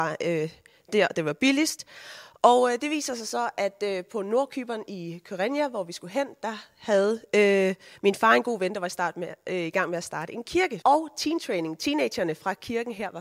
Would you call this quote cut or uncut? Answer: cut